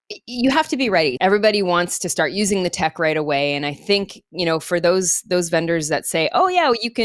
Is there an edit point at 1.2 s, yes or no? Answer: yes